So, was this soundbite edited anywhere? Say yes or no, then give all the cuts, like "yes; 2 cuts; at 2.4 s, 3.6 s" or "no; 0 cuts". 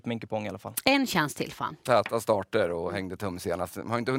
no; 0 cuts